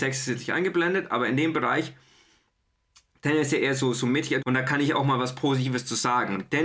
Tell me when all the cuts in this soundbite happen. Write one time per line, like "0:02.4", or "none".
0:04.4